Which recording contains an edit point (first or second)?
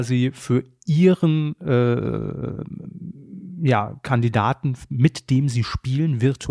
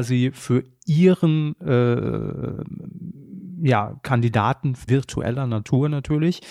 second